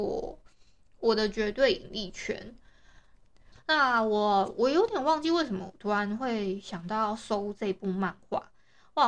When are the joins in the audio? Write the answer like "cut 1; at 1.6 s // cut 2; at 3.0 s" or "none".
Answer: cut 1; at 3.5 s